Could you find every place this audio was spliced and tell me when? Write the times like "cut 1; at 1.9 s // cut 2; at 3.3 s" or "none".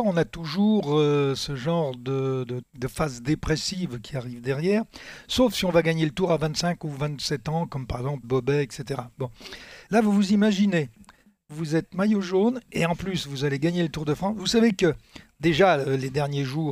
cut 1; at 2.6 s // cut 2; at 8.2 s // cut 3; at 9.9 s